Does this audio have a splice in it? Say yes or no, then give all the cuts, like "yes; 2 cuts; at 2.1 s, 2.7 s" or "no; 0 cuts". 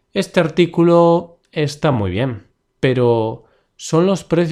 no; 0 cuts